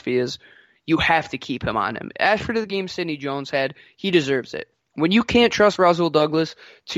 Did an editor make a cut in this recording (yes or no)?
no